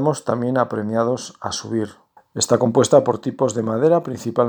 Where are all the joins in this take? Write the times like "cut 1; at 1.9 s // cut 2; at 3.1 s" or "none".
cut 1; at 2.2 s